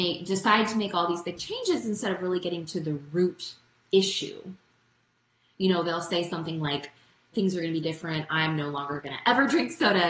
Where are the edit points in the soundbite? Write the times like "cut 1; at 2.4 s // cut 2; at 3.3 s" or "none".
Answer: cut 1; at 7.3 s